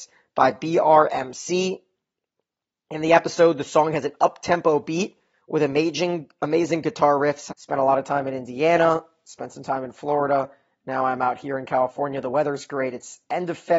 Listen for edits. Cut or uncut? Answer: cut